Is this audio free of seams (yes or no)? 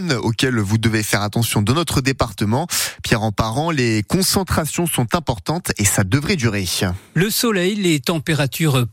yes